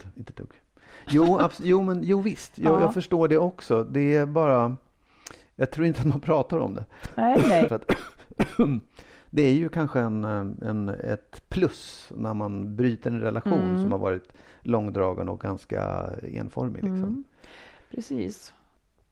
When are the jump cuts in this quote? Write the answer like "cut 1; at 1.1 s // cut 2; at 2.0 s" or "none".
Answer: cut 1; at 7.7 s